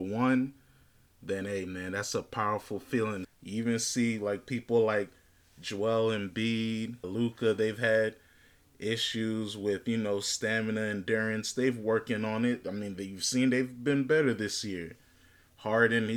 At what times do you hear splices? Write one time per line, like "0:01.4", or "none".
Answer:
0:03.2
0:07.0

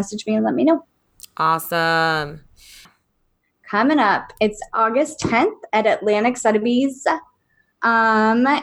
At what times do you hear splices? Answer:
0:02.8

